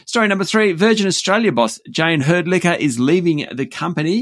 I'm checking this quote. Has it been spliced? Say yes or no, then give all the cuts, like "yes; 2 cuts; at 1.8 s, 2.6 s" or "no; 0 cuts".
no; 0 cuts